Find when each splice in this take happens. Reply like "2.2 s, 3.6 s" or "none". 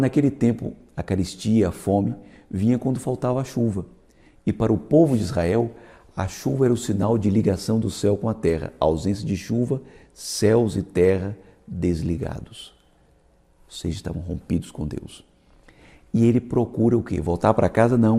none